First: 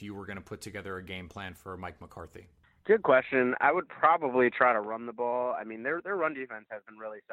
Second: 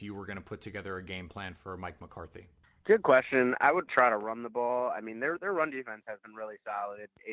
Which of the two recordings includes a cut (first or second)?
second